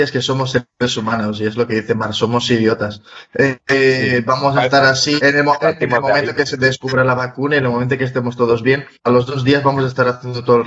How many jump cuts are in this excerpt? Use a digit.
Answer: 2